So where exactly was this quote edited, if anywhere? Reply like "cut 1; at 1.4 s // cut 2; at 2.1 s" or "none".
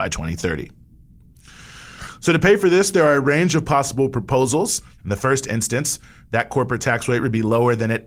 cut 1; at 5.0 s

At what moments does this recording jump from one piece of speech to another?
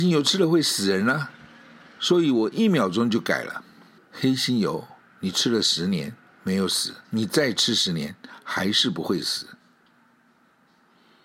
cut 1; at 4.0 s // cut 2; at 7.0 s

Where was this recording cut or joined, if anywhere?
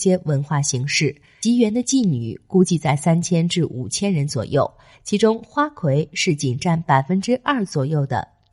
none

